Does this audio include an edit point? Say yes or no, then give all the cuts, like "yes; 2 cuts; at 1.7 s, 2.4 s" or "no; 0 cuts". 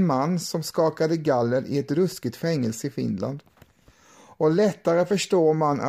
no; 0 cuts